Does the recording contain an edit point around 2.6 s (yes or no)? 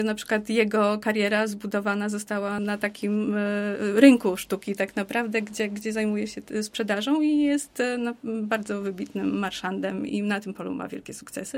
yes